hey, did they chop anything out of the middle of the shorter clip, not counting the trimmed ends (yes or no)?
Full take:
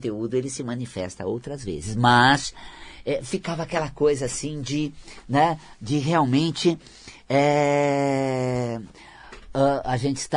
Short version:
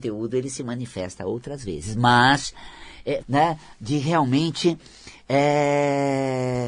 yes